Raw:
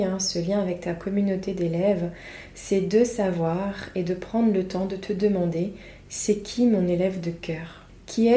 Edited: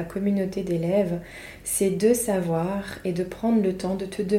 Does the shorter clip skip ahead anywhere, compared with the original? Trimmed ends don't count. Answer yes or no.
no